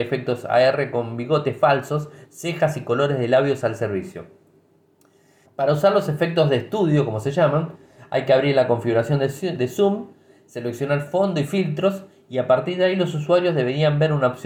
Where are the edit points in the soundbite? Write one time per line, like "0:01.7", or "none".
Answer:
0:05.4